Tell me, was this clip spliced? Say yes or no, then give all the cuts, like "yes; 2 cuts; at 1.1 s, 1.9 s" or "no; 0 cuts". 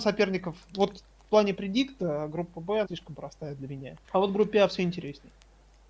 yes; 2 cuts; at 2.8 s, 4.0 s